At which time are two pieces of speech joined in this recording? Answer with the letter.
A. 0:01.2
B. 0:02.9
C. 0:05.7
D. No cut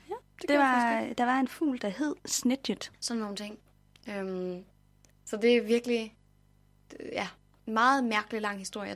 B